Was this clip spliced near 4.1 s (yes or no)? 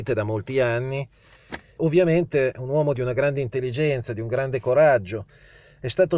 no